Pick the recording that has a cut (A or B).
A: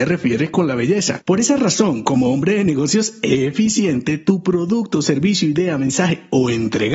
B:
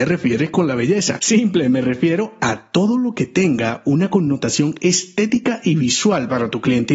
A